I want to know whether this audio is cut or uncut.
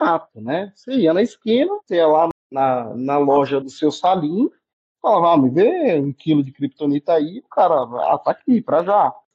cut